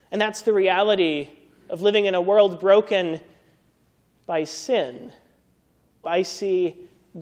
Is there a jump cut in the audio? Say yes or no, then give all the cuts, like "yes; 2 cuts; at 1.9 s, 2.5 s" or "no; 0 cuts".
yes; 1 cut; at 6.0 s